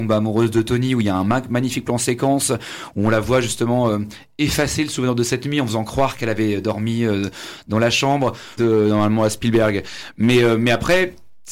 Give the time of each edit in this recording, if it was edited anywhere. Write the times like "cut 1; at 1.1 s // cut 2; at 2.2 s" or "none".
cut 1; at 8.6 s